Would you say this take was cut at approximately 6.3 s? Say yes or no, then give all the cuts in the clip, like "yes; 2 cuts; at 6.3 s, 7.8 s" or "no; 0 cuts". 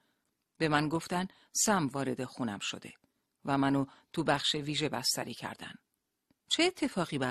yes; 1 cut; at 6.3 s